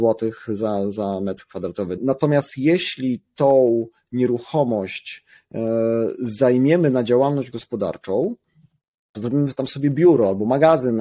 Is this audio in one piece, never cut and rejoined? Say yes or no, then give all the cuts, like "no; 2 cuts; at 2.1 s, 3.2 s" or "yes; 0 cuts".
no; 2 cuts; at 2.0 s, 9.1 s